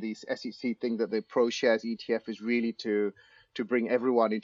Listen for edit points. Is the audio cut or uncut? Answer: uncut